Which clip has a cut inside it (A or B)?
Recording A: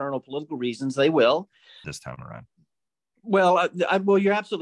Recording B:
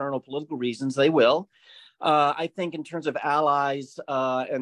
A